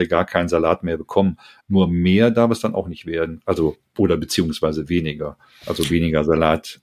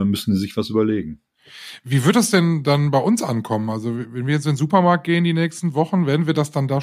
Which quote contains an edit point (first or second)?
first